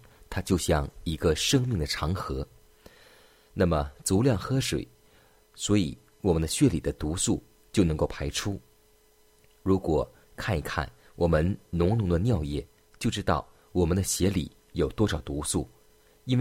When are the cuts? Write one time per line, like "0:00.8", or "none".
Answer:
none